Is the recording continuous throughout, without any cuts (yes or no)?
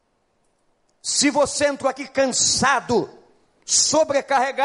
yes